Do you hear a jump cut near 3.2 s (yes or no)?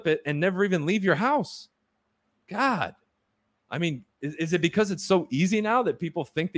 no